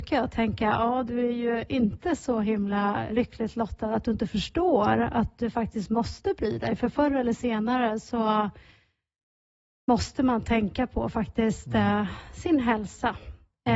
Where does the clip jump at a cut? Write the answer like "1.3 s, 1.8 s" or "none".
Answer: 3.1 s

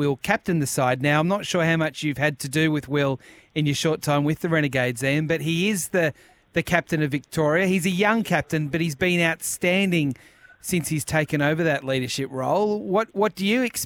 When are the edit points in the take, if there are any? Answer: none

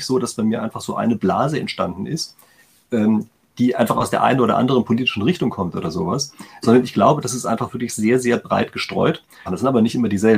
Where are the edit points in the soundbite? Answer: 9.5 s

